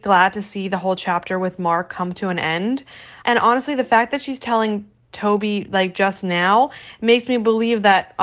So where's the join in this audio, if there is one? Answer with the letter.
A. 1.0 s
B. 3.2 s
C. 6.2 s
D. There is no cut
B